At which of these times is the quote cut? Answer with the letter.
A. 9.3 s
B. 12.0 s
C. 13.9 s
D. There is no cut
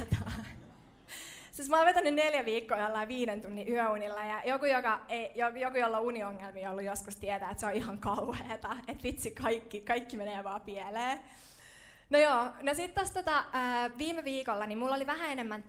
D